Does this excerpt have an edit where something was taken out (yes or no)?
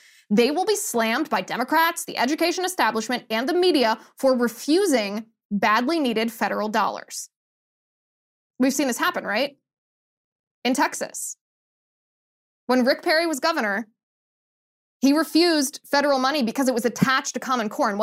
no